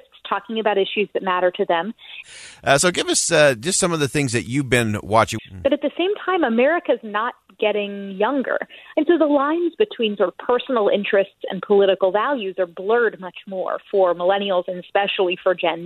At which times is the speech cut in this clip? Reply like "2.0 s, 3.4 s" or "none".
2.2 s, 5.4 s, 8.9 s

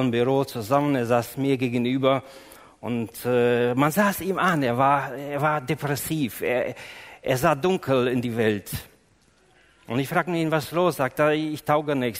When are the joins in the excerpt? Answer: none

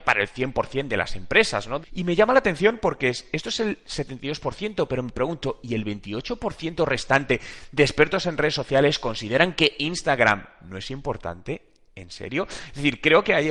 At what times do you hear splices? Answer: 1.8 s

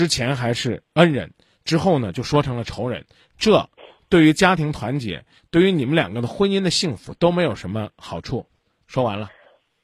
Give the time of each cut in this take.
none

